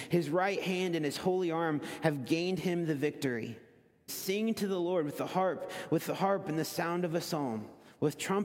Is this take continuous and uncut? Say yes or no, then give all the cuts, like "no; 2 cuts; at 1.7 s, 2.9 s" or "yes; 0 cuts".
no; 1 cut; at 4.1 s